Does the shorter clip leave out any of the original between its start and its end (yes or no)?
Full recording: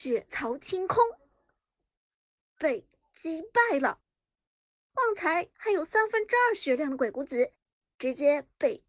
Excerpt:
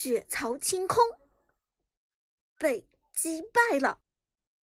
no